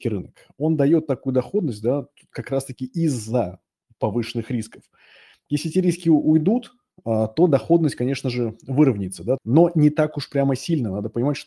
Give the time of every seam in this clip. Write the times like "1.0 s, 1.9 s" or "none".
9.4 s